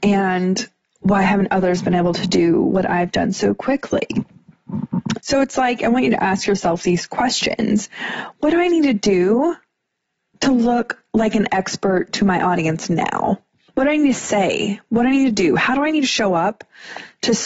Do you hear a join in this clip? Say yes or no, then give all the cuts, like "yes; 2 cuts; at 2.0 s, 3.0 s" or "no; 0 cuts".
yes; 2 cuts; at 5.2 s, 13.7 s